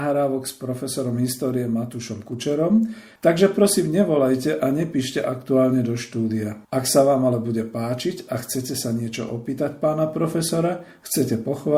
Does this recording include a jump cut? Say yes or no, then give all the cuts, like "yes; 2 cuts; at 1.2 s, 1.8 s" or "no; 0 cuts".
yes; 2 cuts; at 3.2 s, 6.6 s